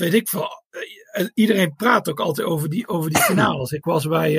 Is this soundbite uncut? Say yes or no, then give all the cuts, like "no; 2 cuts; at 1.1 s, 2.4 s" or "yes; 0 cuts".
yes; 0 cuts